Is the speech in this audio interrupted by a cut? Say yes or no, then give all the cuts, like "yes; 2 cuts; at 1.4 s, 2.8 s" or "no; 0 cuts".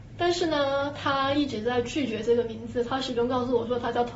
no; 0 cuts